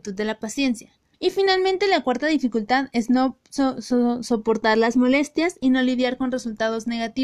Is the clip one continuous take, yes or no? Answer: no